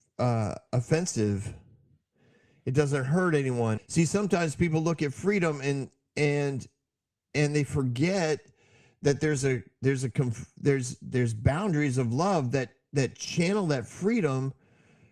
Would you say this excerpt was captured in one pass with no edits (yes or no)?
no